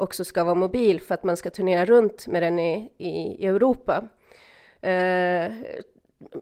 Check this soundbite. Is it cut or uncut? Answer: uncut